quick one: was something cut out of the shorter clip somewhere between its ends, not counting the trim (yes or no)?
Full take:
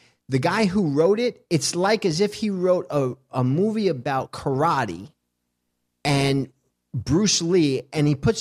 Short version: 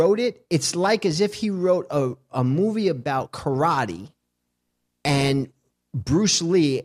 no